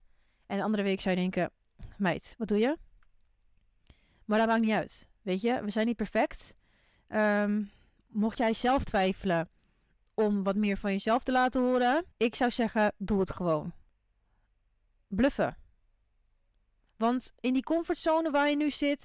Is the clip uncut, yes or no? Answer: no